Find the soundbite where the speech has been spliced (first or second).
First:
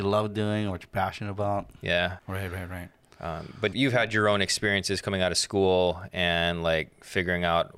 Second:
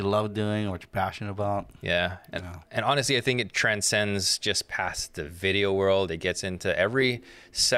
first